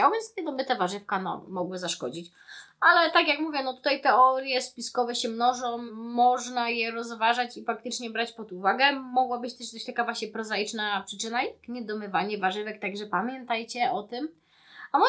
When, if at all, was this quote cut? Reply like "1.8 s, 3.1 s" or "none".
5.9 s